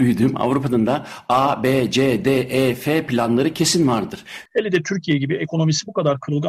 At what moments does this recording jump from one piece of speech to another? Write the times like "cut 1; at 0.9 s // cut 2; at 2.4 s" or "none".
cut 1; at 4.5 s